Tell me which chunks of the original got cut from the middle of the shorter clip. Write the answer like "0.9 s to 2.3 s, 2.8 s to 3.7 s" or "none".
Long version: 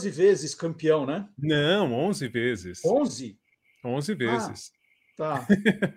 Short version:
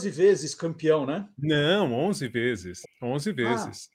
2.8 s to 3.6 s